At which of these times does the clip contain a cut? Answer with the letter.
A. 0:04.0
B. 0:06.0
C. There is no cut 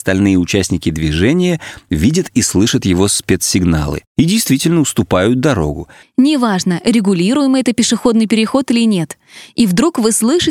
B